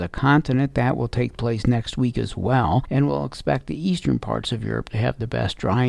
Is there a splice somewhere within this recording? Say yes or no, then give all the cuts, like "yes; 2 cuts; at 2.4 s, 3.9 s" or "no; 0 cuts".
no; 0 cuts